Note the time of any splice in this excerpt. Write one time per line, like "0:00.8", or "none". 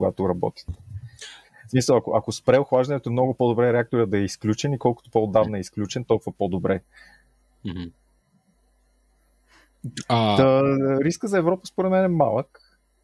none